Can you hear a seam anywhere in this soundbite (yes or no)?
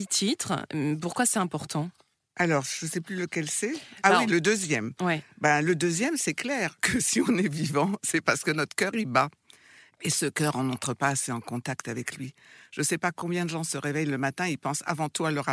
no